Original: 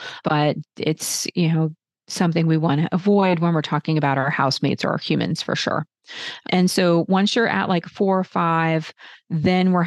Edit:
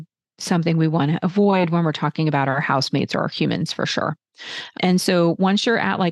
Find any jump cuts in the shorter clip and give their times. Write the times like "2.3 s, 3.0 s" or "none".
none